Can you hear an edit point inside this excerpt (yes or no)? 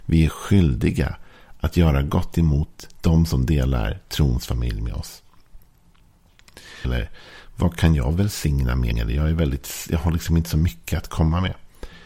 yes